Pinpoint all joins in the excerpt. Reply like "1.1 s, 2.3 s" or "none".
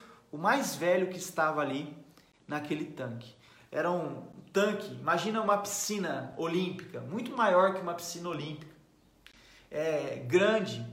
none